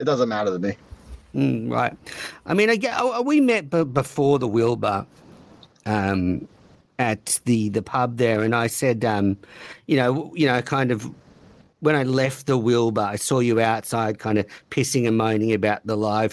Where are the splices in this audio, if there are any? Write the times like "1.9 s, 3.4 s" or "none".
none